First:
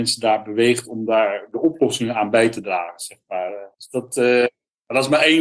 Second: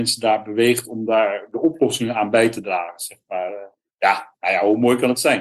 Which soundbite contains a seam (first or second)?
first